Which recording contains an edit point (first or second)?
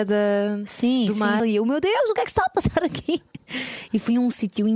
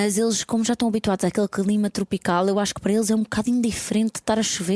first